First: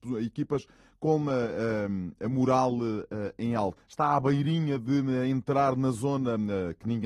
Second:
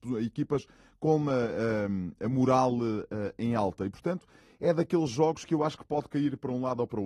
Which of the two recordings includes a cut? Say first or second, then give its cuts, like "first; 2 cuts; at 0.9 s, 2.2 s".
first; 1 cut; at 3.8 s